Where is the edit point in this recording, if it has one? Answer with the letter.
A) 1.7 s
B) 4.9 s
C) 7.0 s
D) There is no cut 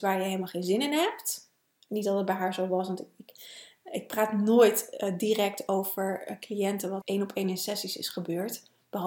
C